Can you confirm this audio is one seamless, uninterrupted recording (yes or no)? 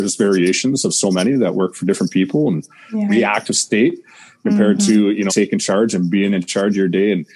no